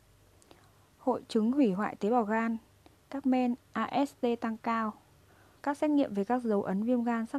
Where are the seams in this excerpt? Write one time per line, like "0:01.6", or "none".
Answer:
0:03.6
0:05.6

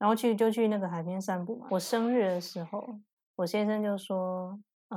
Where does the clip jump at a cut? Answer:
0:01.7
0:03.2

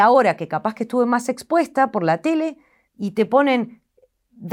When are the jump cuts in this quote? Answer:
0:02.9

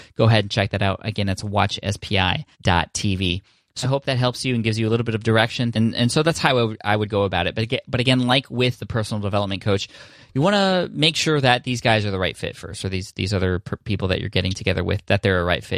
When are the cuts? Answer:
0:02.5
0:03.8
0:05.7

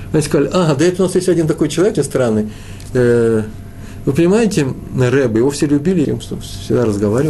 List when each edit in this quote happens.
0:01.9
0:06.0

